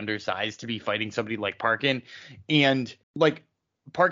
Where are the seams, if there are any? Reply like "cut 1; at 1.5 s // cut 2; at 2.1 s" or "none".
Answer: cut 1; at 3.0 s